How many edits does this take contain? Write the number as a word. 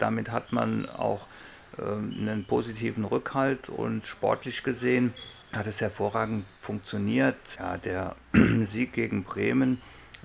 two